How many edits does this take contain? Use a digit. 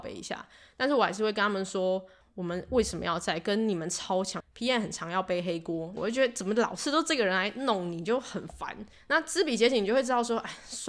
2